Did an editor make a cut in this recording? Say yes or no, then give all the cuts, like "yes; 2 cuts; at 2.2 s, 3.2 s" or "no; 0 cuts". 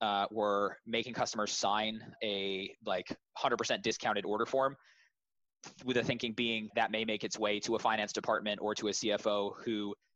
yes; 2 cuts; at 2.2 s, 6.7 s